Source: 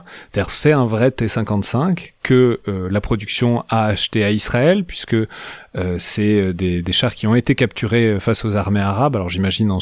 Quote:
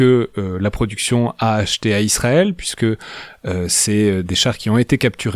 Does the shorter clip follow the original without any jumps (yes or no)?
no